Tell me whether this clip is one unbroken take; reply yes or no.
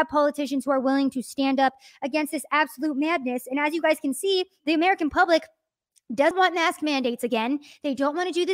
no